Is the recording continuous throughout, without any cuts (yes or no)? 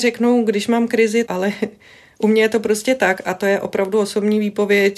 no